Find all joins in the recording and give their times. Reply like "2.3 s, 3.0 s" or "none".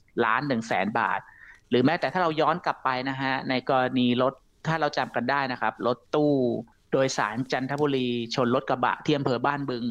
none